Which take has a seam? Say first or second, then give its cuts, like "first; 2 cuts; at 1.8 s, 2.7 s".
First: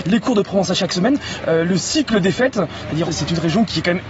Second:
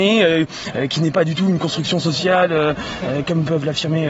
first; 1 cut; at 3.1 s